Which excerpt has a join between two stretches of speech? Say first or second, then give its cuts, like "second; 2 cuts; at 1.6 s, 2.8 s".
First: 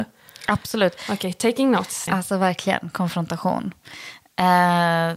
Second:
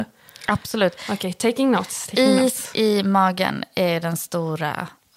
first; 1 cut; at 2.1 s